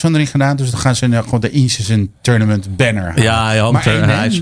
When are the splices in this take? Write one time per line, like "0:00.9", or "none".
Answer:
none